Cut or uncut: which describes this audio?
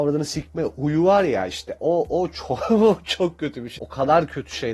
cut